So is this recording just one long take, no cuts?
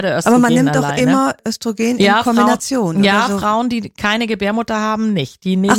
yes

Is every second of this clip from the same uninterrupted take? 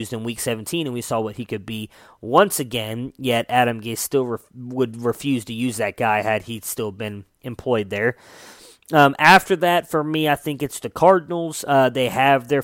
yes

